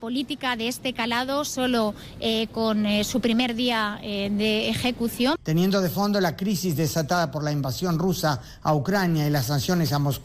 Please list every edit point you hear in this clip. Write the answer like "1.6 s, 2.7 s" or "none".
5.4 s